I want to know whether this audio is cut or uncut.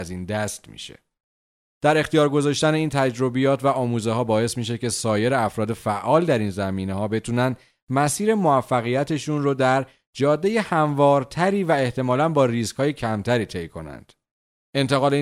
cut